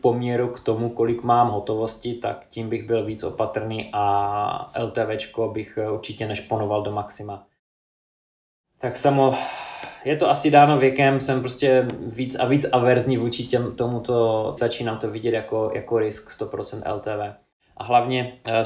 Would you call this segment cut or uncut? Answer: cut